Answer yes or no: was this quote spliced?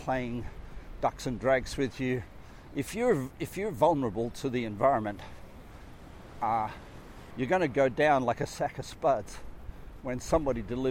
yes